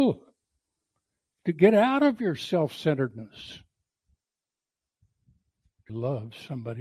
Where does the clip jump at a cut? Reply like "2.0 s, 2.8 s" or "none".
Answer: 5.9 s

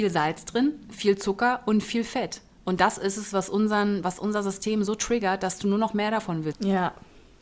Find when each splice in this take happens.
6.5 s

